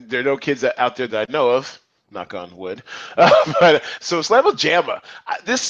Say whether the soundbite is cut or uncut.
uncut